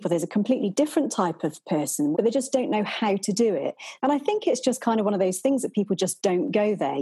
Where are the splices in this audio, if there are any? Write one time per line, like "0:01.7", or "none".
0:02.1
0:04.0